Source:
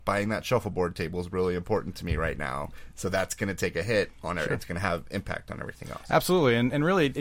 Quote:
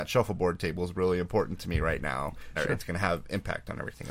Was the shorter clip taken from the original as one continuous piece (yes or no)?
no